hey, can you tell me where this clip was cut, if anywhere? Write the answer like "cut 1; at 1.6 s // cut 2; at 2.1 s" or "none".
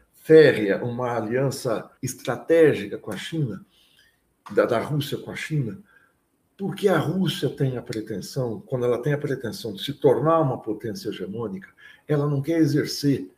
cut 1; at 2.0 s

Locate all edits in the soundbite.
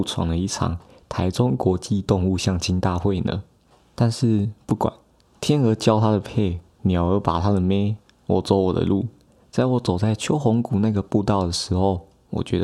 none

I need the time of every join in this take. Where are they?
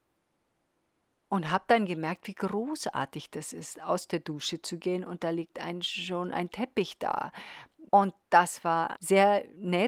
cut 1; at 7.9 s // cut 2; at 9.0 s

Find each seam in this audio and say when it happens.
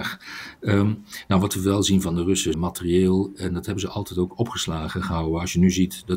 cut 1; at 2.5 s

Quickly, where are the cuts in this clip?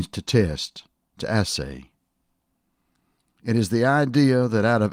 none

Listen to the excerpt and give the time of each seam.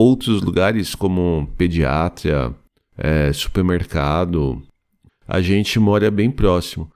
cut 1; at 2.9 s // cut 2; at 5.1 s

